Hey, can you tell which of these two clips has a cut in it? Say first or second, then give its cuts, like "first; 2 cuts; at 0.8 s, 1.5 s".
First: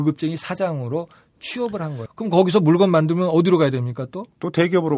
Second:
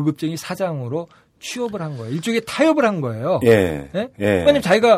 first; 1 cut; at 2.1 s